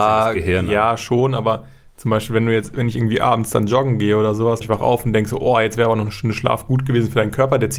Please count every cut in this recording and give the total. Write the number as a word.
one